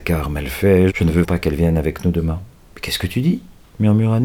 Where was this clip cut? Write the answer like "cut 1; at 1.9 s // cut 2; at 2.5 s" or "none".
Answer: cut 1; at 1.2 s